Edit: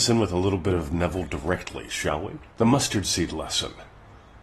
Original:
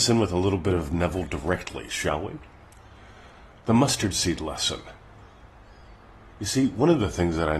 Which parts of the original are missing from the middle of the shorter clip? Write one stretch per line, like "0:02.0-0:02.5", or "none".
0:02.5-0:03.6